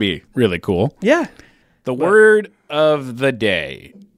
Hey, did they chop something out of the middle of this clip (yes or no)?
no